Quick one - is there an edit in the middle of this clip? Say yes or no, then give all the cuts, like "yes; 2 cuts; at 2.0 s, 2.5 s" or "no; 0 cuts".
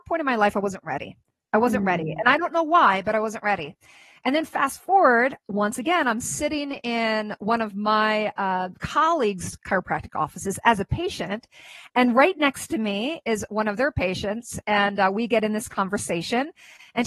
no; 0 cuts